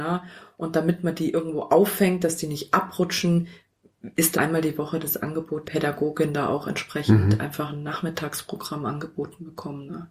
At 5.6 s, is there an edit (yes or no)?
yes